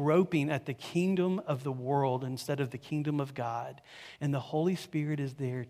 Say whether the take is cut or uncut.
uncut